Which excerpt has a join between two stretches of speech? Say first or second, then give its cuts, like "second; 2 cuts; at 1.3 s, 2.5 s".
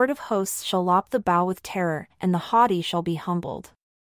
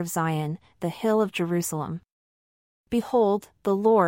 first; 1 cut; at 2.1 s